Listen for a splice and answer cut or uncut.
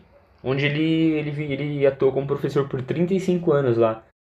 uncut